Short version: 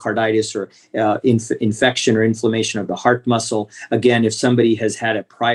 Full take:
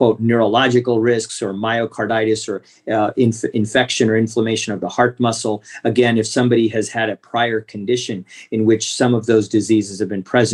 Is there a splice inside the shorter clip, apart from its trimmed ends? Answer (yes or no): no